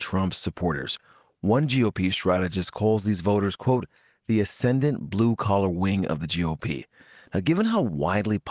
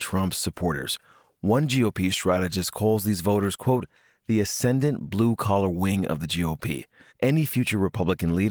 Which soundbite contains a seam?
second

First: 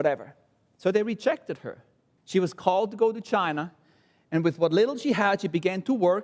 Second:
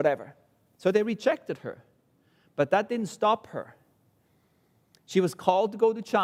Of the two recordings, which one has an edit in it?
first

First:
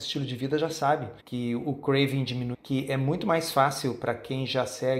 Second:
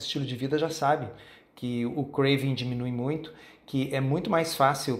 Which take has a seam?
first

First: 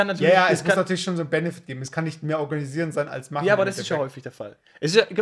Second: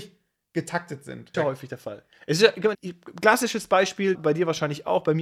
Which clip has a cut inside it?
second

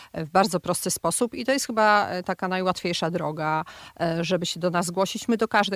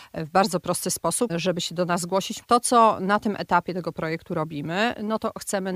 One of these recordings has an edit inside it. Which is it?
second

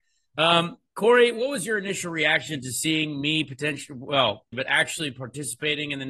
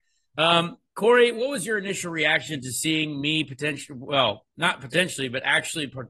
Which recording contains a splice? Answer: first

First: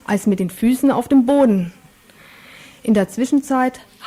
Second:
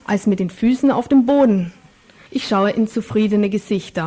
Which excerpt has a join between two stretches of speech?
second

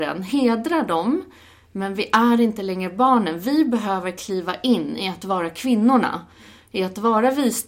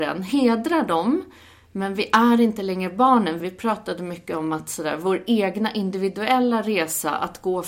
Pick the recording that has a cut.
second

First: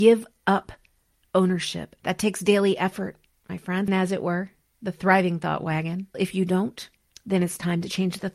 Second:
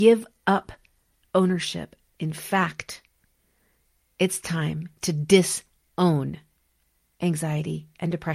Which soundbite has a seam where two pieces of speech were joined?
first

